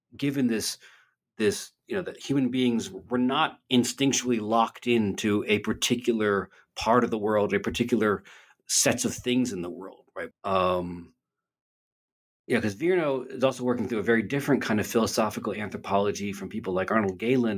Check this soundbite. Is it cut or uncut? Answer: cut